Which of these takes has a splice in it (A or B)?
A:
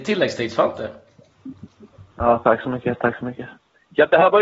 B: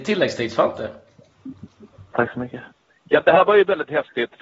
B